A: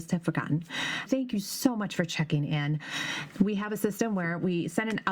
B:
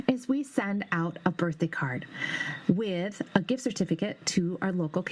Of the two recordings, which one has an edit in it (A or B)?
A